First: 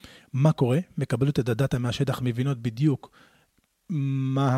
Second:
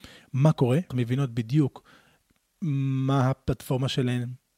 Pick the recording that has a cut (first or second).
second